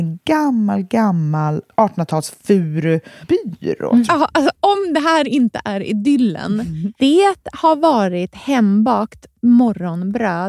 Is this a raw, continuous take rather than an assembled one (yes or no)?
no